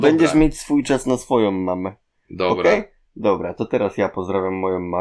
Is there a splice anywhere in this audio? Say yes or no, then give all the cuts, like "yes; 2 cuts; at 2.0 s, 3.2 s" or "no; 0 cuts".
no; 0 cuts